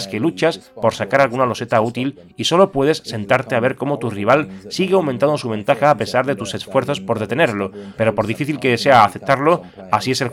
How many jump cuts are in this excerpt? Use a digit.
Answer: 1